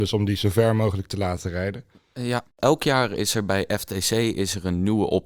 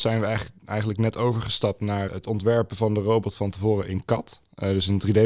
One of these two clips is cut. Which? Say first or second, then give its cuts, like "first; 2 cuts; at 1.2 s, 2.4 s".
second; 1 cut; at 2.1 s